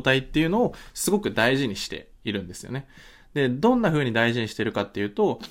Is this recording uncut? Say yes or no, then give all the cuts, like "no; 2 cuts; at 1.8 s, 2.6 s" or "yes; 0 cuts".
yes; 0 cuts